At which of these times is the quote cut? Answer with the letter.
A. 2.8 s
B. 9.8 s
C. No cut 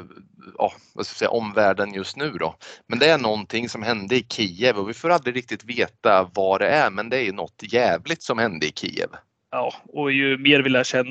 C